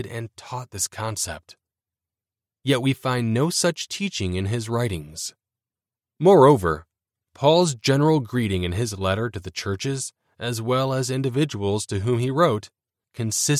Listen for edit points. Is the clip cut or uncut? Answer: uncut